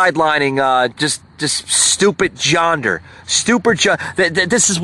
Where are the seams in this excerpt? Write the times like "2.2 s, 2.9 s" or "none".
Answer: 0.9 s